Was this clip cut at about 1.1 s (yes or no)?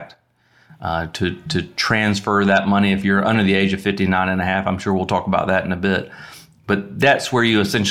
no